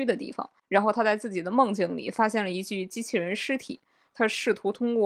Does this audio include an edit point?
no; 0 cuts

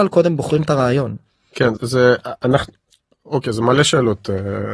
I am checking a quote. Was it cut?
yes; 1 cut; at 1.8 s

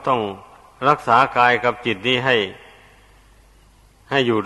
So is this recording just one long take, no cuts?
yes; 0 cuts

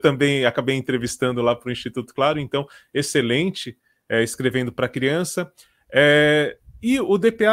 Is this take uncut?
yes; 0 cuts

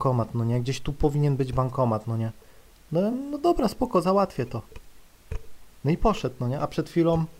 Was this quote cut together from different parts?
no; 0 cuts

